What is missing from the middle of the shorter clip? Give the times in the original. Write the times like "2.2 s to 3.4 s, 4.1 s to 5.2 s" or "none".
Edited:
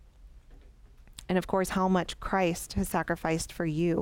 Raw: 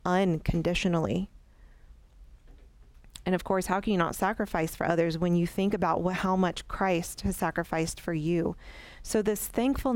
3.7 s to 6.2 s